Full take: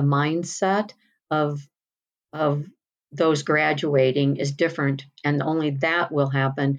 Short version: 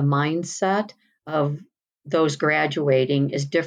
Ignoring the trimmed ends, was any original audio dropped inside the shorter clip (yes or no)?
yes